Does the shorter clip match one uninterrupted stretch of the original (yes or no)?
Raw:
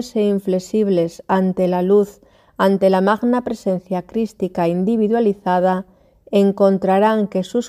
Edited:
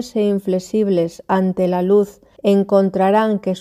no